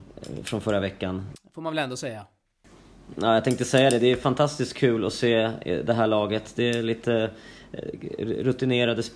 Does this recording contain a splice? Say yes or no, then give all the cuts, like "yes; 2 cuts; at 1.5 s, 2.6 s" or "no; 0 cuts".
yes; 1 cut; at 1.3 s